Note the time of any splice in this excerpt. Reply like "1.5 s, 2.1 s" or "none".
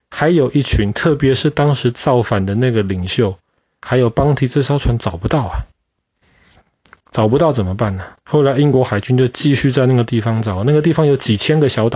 8.2 s